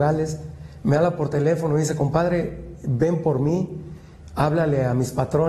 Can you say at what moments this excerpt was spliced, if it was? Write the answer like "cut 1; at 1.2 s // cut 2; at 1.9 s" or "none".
none